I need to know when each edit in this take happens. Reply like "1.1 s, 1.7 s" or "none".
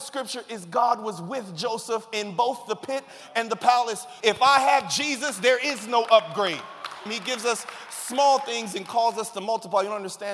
4.2 s, 7.1 s

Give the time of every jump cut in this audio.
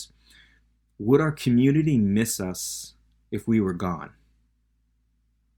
none

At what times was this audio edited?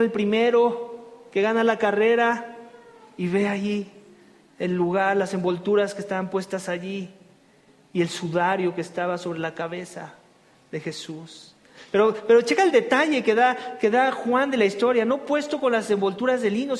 none

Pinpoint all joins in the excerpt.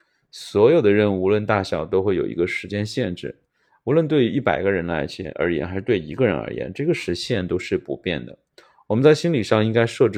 none

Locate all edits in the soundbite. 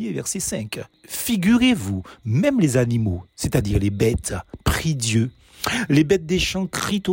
none

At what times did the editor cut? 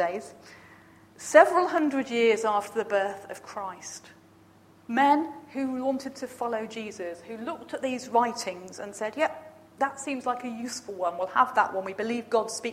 none

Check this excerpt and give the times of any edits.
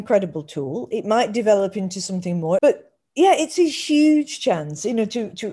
2.6 s

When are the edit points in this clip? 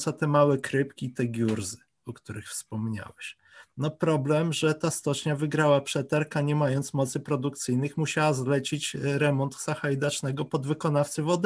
none

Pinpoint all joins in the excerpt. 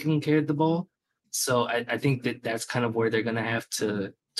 1.2 s

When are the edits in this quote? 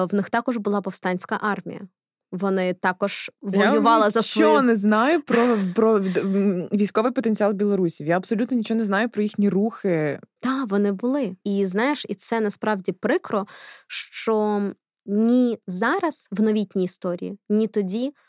10.4 s, 11.4 s

